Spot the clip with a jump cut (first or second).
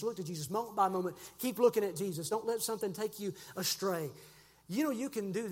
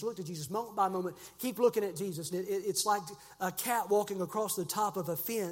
second